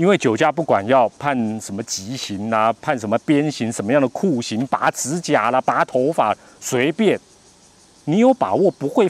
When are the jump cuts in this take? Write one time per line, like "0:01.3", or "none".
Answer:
none